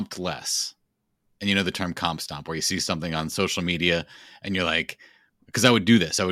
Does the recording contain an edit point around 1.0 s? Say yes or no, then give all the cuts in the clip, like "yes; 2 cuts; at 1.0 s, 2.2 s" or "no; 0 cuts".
no; 0 cuts